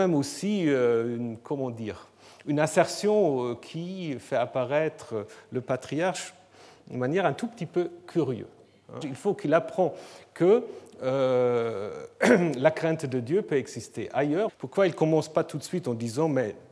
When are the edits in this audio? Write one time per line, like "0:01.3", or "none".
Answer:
0:09.0
0:14.5